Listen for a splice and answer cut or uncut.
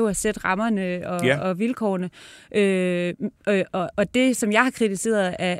uncut